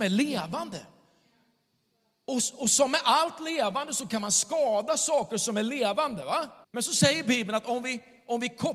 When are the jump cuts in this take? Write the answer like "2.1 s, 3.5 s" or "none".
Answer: 6.6 s